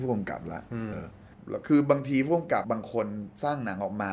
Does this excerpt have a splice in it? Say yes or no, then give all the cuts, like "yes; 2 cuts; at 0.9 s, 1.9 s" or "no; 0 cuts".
yes; 2 cuts; at 0.9 s, 2.6 s